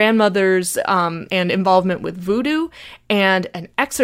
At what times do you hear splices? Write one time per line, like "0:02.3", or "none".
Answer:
0:01.3